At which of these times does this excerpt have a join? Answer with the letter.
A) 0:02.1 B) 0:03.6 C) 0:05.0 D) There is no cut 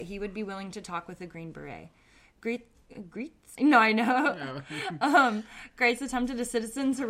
B